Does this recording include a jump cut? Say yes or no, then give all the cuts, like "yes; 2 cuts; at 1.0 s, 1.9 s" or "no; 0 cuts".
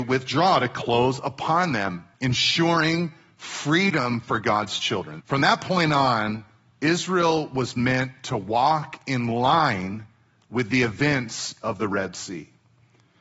yes; 1 cut; at 5.2 s